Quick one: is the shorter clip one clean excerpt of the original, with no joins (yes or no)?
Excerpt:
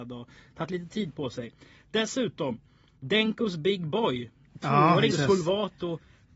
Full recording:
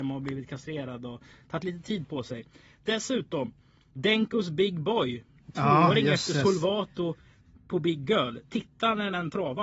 no